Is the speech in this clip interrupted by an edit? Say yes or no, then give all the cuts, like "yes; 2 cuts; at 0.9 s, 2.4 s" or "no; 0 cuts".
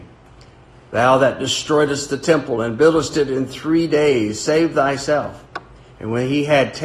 yes; 1 cut; at 5.9 s